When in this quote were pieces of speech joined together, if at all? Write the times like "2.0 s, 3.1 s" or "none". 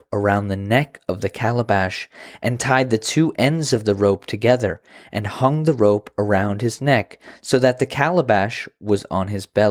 none